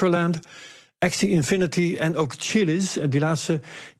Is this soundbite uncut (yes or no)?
yes